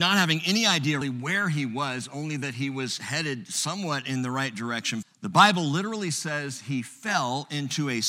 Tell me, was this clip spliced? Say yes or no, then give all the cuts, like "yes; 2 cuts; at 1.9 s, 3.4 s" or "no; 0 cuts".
yes; 2 cuts; at 1.0 s, 5.0 s